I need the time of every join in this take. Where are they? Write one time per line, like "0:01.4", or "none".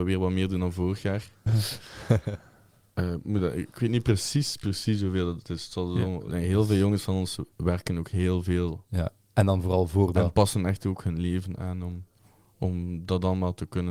0:01.5
0:06.3
0:07.5